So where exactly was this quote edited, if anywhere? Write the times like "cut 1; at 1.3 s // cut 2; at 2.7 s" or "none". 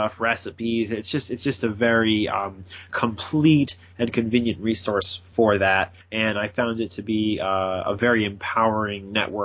cut 1; at 6.0 s